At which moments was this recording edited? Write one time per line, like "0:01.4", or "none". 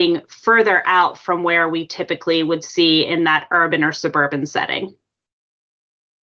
none

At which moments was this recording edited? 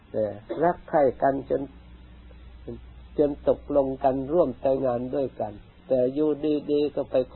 0:04.8

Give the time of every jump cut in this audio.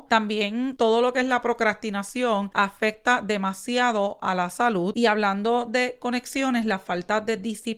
none

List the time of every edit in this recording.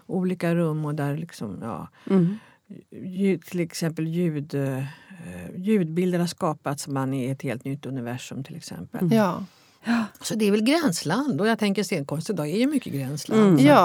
0:09.8

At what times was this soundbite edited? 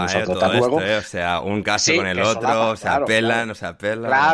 none

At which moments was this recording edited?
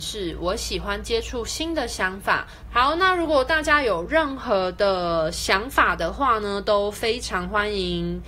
0:02.7

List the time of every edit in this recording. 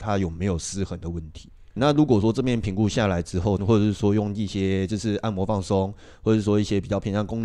0:01.8
0:03.6

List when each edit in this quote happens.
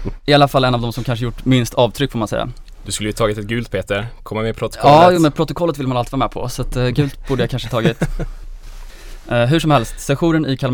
none

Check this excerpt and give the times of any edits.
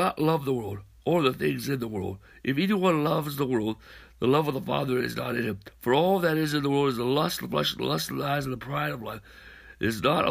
none

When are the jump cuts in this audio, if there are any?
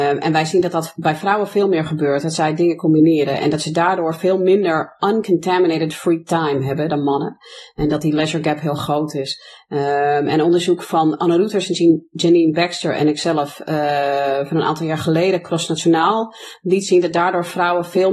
none

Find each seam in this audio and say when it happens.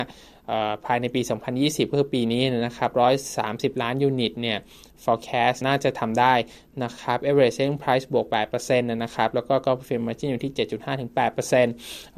0:05.6

